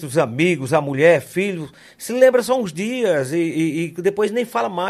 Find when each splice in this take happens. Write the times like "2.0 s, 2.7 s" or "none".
none